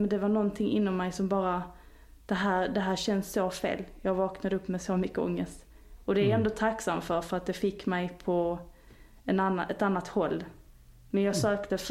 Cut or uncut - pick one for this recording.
uncut